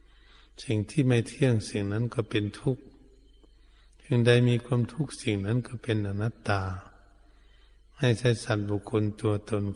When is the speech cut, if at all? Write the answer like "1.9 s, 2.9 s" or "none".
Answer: none